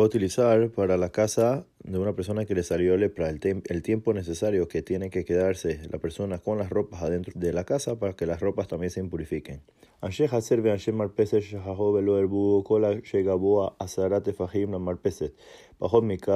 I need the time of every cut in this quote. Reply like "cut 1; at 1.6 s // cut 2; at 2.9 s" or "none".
cut 1; at 7.3 s // cut 2; at 9.9 s